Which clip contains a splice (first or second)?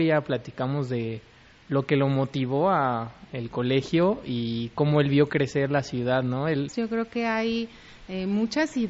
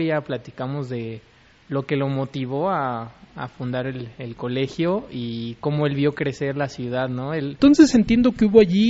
first